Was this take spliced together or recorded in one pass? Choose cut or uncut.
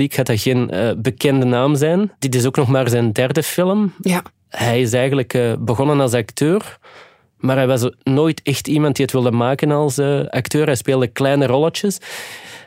uncut